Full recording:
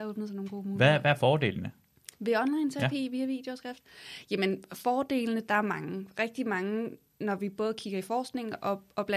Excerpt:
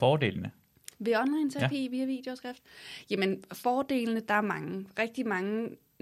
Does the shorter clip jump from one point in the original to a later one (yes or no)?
no